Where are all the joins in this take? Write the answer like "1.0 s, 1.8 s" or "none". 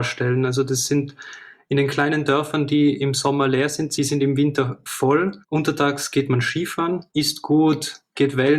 5.4 s, 7.1 s